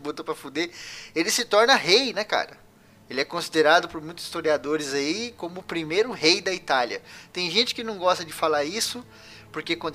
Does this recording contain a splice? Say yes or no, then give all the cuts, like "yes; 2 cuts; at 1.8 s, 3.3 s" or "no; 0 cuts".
no; 0 cuts